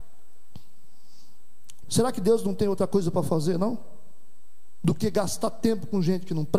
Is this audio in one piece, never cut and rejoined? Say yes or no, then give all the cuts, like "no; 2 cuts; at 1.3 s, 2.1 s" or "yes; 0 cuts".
no; 1 cut; at 1.8 s